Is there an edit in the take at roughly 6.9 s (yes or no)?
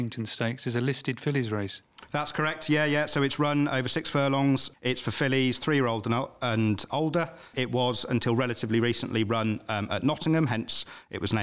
yes